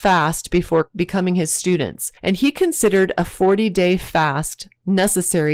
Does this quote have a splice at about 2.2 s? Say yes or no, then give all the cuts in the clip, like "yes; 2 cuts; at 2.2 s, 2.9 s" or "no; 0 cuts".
yes; 1 cut; at 2.2 s